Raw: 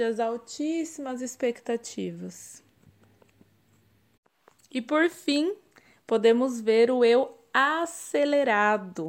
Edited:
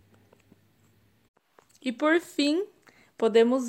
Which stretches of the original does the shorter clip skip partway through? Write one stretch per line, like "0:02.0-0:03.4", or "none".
none